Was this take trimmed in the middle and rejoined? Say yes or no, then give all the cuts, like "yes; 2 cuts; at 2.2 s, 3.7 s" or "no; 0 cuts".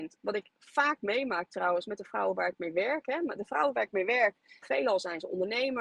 yes; 1 cut; at 4.6 s